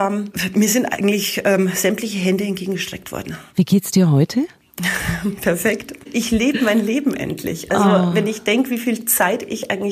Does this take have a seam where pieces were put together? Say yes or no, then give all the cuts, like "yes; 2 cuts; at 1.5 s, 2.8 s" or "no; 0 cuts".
no; 0 cuts